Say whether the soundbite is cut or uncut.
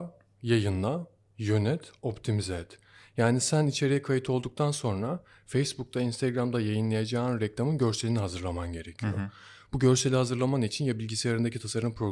uncut